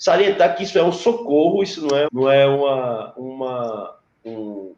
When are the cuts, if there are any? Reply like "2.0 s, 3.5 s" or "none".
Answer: 2.1 s